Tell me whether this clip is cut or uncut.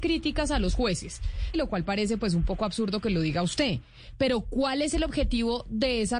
cut